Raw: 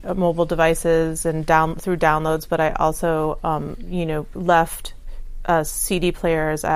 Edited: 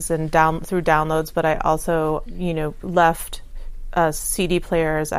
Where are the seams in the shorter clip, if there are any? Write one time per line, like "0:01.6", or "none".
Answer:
0:02.3

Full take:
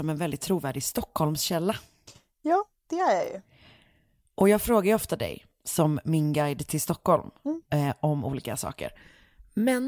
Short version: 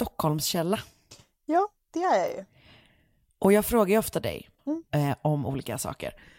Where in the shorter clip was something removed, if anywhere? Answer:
0:04.6

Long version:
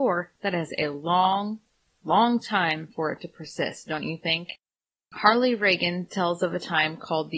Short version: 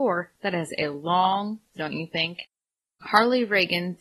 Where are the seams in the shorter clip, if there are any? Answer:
0:01.7

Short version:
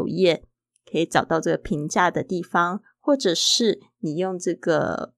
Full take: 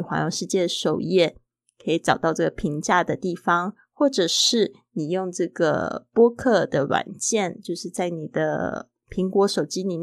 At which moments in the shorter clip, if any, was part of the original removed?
none

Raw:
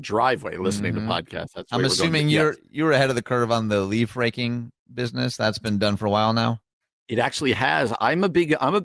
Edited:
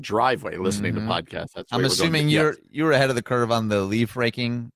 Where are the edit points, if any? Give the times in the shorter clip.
none

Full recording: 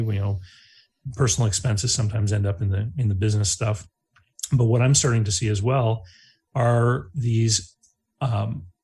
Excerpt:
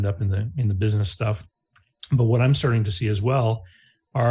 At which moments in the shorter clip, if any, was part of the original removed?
none

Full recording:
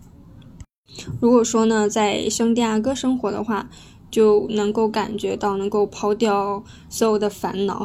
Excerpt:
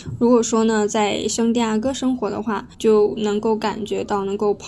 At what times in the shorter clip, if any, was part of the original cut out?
0:02.7

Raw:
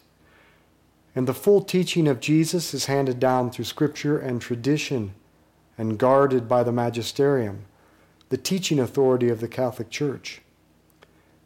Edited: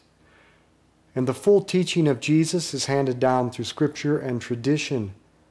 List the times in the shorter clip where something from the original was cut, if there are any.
none

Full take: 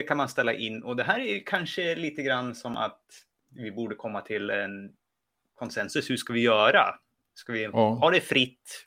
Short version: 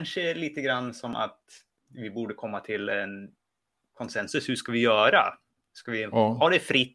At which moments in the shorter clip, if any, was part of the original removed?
none

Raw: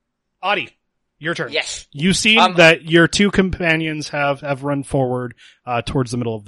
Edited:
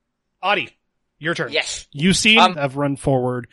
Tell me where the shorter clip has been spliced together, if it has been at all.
0:02.5

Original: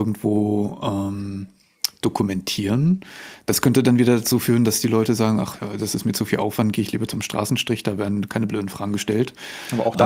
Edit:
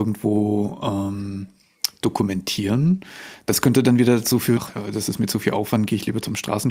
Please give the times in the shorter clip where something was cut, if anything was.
0:04.6

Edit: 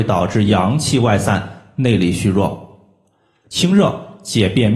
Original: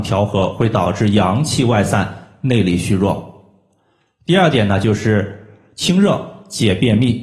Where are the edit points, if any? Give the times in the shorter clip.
0:03.4

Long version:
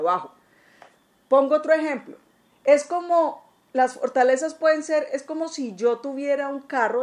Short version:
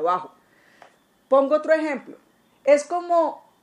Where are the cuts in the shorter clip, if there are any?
none

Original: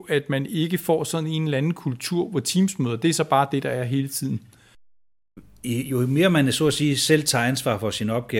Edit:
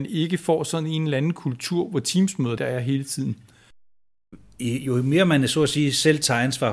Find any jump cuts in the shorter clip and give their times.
0:02.6

